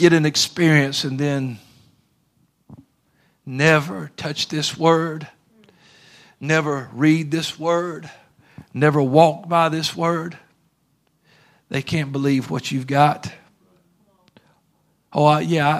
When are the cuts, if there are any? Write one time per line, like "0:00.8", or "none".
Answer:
none